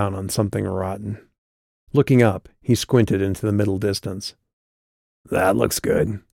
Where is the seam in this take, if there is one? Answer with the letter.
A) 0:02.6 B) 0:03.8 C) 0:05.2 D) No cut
D